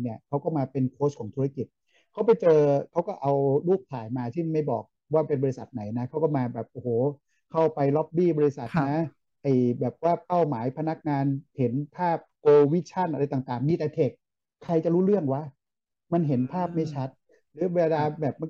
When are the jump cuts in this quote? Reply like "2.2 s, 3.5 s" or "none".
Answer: none